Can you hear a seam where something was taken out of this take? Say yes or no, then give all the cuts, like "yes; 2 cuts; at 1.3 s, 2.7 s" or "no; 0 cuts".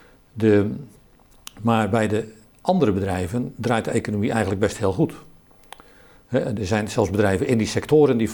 yes; 1 cut; at 6.6 s